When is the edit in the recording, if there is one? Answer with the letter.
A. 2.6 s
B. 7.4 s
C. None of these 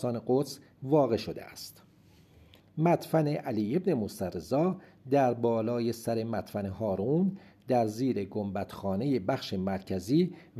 A